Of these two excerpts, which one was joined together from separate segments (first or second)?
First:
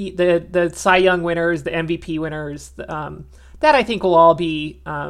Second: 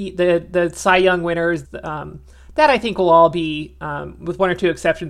second